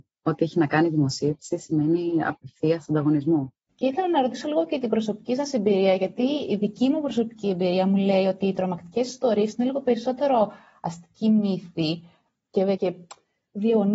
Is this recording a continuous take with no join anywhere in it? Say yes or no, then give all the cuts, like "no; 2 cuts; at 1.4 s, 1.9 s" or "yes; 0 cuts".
no; 2 cuts; at 3.7 s, 12.8 s